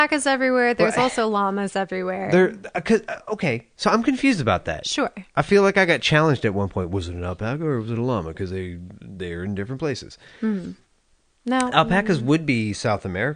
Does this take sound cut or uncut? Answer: uncut